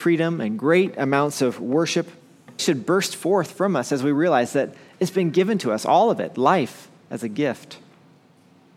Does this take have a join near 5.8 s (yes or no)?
no